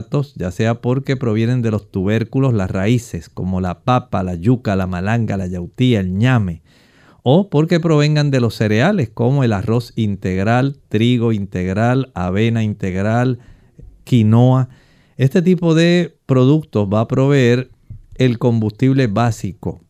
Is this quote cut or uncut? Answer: uncut